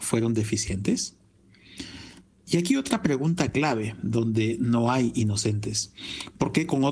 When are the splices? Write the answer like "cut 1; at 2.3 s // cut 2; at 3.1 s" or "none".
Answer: none